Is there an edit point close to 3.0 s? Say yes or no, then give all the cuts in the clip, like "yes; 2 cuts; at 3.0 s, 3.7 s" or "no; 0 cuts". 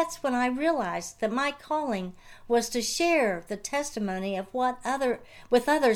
no; 0 cuts